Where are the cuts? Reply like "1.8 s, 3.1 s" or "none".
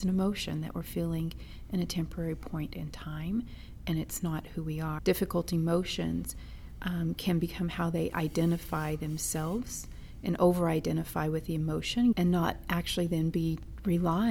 5.0 s, 12.1 s